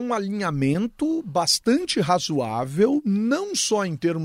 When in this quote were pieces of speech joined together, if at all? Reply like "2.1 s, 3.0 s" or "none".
none